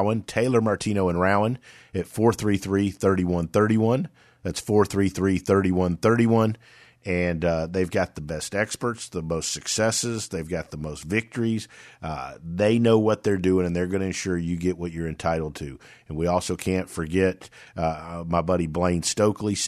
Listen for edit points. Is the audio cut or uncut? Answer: uncut